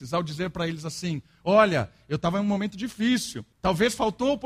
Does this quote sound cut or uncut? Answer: cut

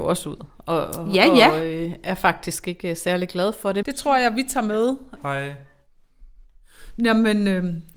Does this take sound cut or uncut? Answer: cut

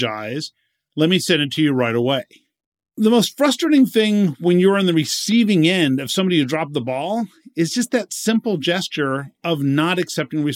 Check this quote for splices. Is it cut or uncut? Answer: uncut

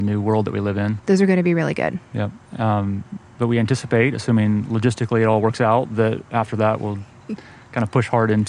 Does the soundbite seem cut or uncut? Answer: cut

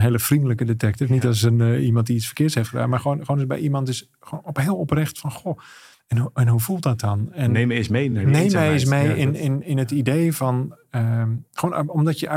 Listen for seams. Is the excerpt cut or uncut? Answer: uncut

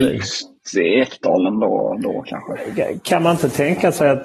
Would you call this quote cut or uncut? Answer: uncut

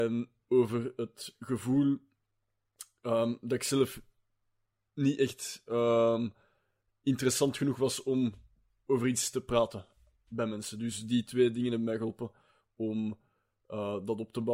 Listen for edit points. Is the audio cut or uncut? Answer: uncut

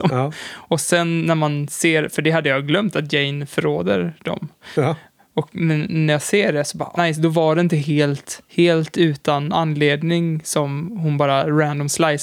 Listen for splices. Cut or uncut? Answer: cut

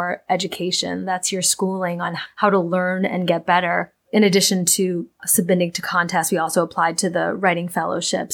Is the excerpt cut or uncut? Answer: uncut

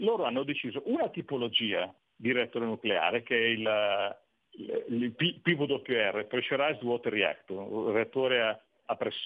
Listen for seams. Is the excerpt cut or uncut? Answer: uncut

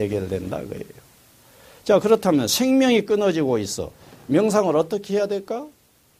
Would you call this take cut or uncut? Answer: uncut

